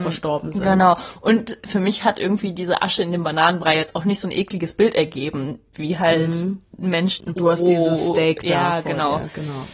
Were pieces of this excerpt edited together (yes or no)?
yes